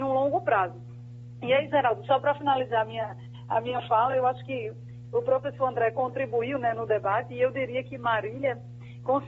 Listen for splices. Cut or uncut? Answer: uncut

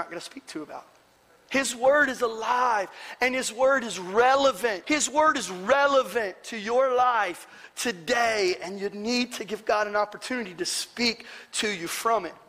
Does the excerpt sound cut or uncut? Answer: cut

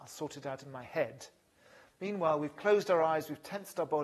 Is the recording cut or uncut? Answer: uncut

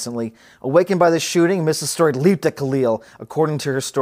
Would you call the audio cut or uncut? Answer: uncut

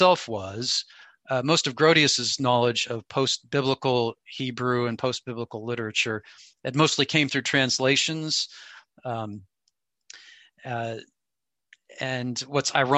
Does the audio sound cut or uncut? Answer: uncut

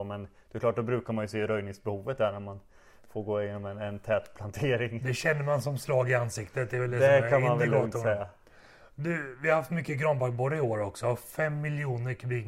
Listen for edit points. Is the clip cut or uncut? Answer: uncut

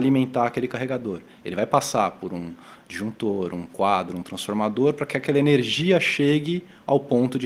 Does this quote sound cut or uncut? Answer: uncut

